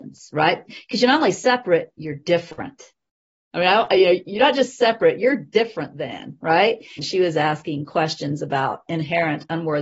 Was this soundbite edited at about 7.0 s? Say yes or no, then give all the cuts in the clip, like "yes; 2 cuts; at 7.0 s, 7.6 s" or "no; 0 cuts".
yes; 1 cut; at 7.0 s